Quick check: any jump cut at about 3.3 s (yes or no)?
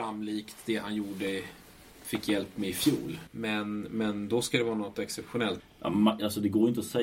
yes